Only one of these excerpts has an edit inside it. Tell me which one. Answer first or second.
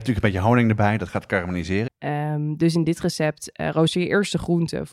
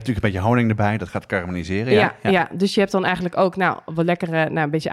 first